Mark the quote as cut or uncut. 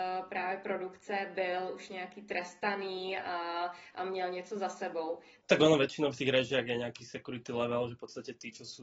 cut